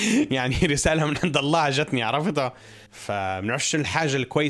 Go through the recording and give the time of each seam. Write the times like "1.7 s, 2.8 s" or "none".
2.9 s